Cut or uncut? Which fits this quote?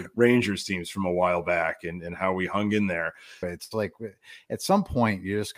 cut